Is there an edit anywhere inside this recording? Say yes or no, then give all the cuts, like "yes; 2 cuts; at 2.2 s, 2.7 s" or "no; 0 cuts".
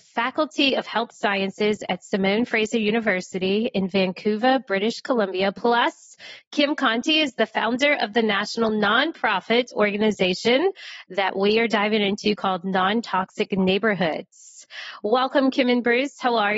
no; 0 cuts